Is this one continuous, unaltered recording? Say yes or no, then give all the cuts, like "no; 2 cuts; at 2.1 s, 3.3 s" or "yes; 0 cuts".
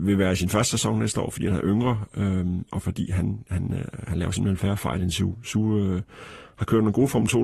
yes; 0 cuts